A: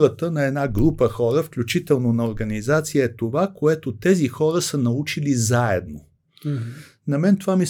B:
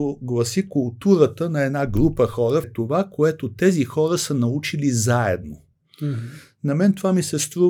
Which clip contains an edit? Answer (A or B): B